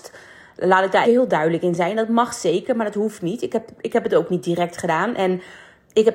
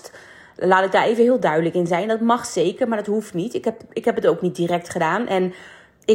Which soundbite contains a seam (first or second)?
first